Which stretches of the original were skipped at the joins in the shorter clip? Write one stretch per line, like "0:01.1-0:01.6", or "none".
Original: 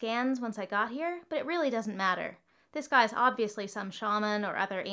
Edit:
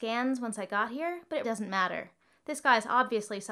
0:01.4-0:01.7